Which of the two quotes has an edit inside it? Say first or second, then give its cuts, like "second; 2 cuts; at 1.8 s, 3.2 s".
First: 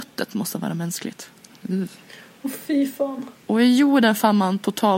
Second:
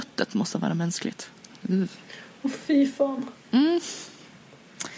first; 1 cut; at 3.4 s